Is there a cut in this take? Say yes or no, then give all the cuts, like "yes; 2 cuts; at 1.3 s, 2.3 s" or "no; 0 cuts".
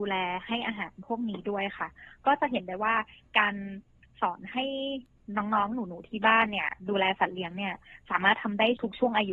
no; 0 cuts